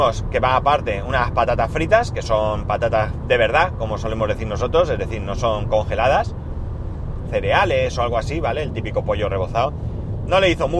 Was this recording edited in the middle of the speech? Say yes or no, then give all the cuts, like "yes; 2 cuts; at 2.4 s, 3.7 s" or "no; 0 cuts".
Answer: yes; 1 cut; at 7.2 s